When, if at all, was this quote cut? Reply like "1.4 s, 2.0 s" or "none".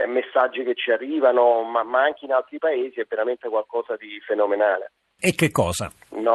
5.2 s